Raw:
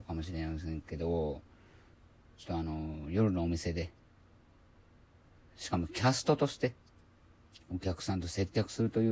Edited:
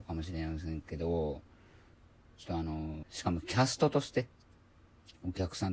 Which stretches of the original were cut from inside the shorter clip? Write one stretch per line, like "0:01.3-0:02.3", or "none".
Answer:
0:03.0-0:05.5